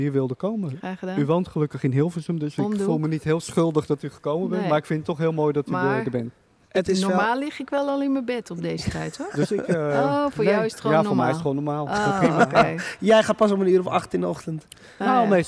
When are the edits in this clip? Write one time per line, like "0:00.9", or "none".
0:09.3